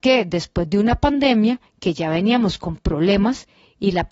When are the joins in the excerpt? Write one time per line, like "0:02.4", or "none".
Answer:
none